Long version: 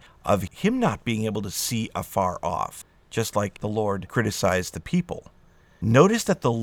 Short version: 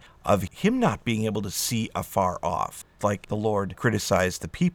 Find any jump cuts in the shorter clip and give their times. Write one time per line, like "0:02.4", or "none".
0:03.0